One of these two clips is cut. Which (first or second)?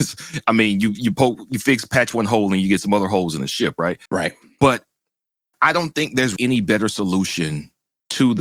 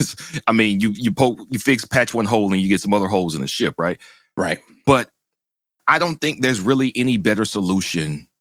first